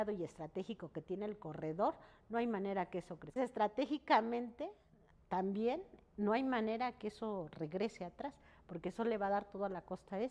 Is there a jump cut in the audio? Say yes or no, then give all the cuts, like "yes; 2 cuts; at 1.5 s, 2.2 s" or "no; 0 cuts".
yes; 1 cut; at 3.4 s